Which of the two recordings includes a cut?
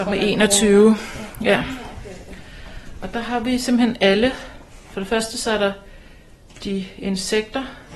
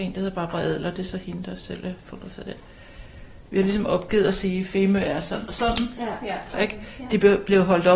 second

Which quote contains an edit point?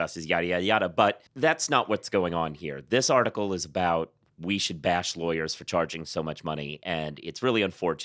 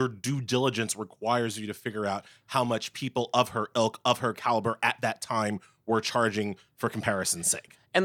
first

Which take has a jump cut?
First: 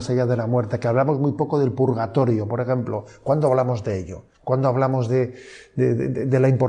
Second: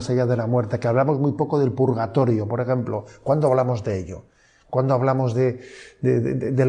first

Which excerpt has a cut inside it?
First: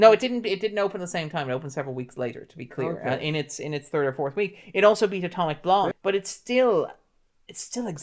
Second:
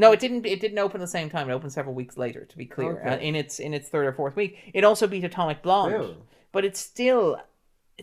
first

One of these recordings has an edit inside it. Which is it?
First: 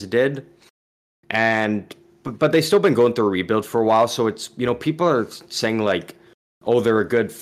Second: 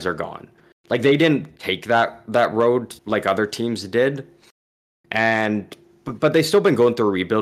second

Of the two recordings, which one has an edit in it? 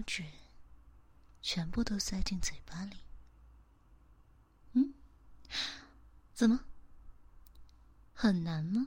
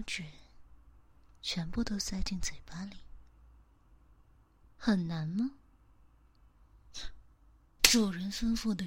second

